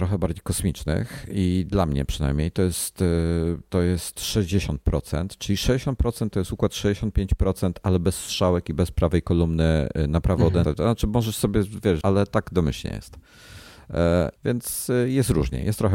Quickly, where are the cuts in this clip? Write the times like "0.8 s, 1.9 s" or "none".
10.6 s, 12.0 s, 14.4 s

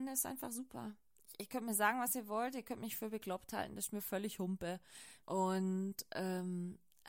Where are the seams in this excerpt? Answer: 5.2 s

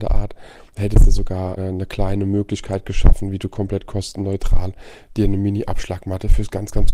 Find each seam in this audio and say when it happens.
1.6 s

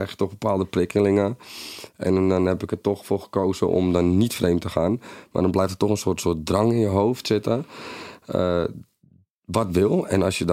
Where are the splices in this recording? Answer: none

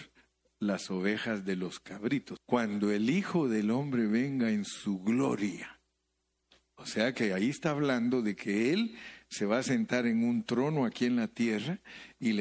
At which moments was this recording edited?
2.4 s

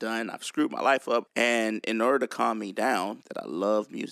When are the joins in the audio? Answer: 1.3 s, 3.2 s

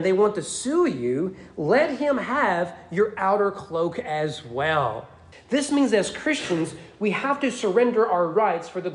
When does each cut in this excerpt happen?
5.3 s

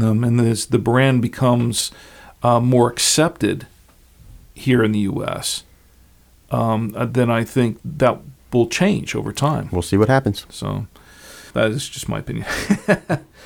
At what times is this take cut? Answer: 7.8 s, 11.5 s

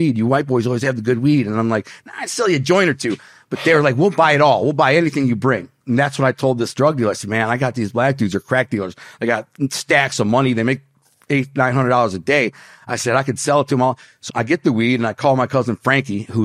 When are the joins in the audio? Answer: 14.3 s

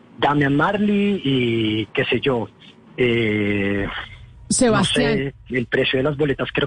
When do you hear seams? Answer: 5.5 s

